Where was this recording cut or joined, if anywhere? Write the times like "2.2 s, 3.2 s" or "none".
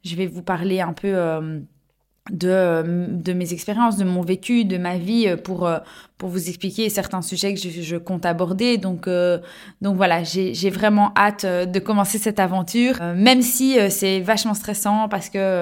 none